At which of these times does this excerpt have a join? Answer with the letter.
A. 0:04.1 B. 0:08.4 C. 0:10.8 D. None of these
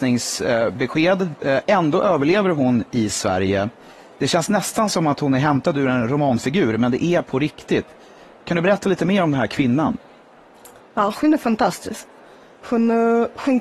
D